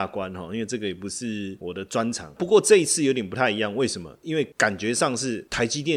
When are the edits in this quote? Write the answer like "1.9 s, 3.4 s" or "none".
2.4 s